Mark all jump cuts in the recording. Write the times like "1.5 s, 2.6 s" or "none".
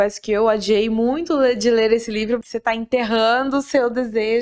2.4 s

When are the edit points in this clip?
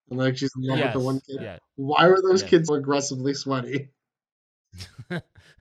2.7 s

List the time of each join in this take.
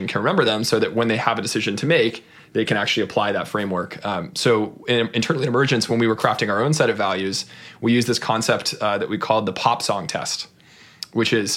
none

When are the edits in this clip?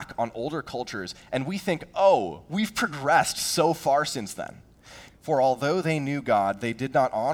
5.1 s

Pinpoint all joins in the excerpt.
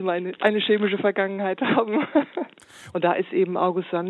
2.9 s

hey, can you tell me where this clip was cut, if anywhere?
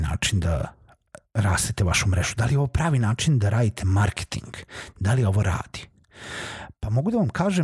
none

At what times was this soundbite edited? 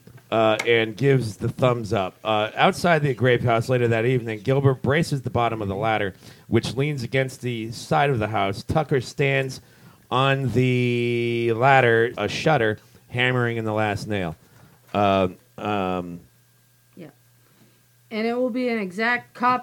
12.1 s

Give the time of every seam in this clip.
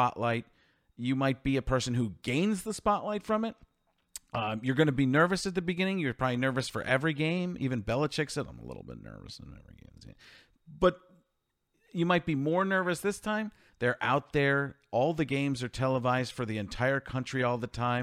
13.7 s

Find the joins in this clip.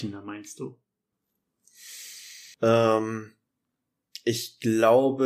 2.5 s

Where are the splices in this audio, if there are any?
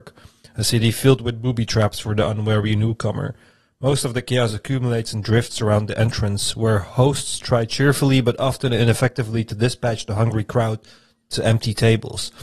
none

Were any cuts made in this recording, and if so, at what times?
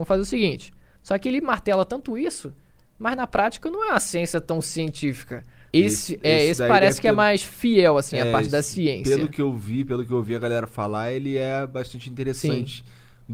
1.0 s, 5.7 s

